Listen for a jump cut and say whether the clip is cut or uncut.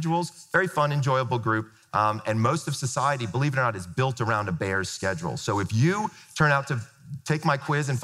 uncut